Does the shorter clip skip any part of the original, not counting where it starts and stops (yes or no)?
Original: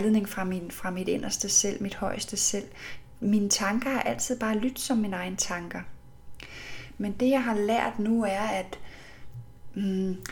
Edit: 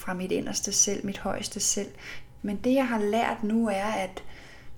yes